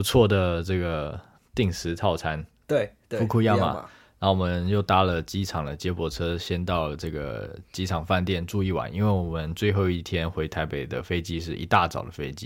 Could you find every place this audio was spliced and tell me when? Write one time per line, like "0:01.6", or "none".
0:02.6